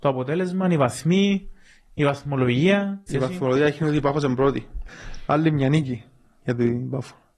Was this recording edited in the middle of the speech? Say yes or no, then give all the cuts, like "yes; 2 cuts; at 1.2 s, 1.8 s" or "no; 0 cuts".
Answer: yes; 2 cuts; at 3.1 s, 4.9 s